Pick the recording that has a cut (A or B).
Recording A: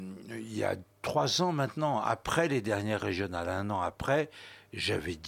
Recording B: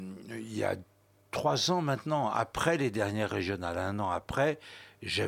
A